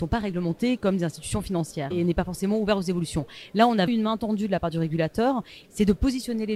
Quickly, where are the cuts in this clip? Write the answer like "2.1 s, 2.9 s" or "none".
1.9 s, 3.9 s, 5.6 s